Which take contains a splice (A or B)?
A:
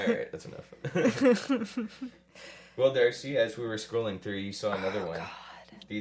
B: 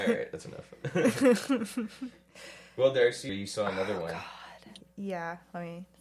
B